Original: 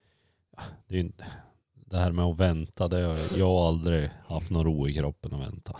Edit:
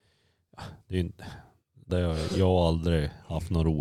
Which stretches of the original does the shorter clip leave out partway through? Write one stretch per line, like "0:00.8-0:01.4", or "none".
0:01.9-0:02.9